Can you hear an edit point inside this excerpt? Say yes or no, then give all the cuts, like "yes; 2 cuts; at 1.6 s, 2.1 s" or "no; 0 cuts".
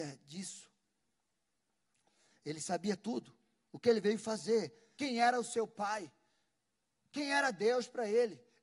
yes; 1 cut; at 4.9 s